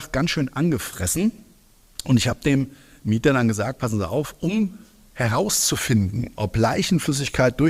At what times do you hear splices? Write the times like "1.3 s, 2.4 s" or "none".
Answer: none